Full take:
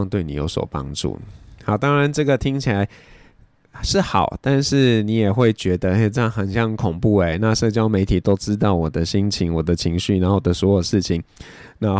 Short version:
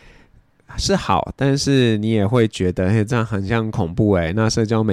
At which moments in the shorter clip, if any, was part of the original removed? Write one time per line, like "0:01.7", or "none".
none